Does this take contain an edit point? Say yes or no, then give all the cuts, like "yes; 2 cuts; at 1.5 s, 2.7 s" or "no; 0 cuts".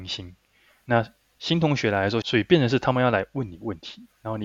yes; 1 cut; at 2.2 s